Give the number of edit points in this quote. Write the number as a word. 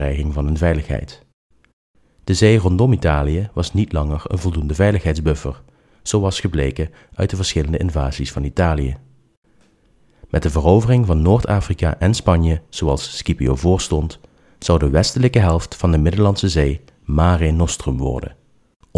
zero